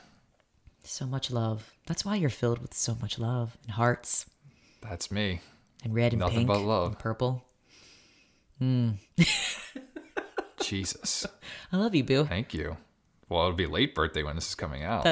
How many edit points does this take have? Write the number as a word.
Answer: one